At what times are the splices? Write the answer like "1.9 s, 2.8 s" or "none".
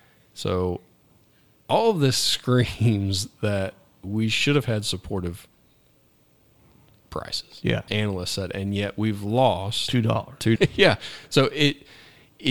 7.9 s, 10.6 s